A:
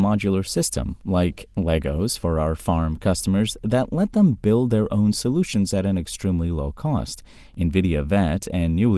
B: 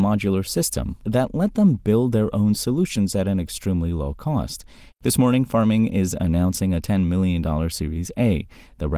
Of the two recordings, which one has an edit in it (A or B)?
B